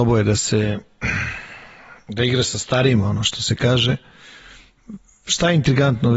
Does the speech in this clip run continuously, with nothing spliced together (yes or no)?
yes